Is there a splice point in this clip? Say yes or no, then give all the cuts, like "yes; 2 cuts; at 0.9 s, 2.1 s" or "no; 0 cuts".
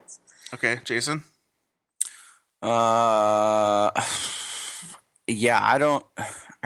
no; 0 cuts